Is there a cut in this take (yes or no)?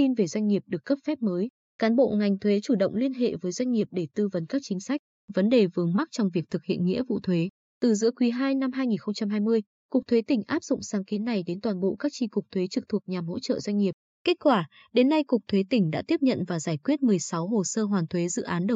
no